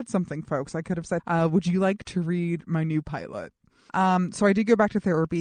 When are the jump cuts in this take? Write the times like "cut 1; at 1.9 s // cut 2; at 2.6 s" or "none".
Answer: cut 1; at 1.2 s // cut 2; at 3.9 s